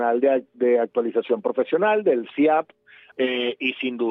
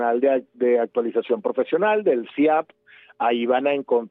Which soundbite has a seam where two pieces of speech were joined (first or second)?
first